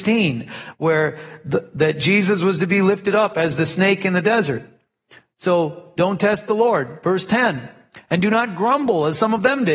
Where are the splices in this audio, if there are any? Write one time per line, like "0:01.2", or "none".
none